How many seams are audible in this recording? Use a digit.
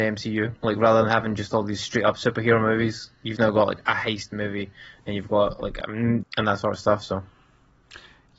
1